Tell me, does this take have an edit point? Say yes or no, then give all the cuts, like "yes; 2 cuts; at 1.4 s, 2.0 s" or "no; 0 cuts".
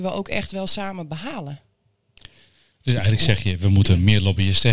no; 0 cuts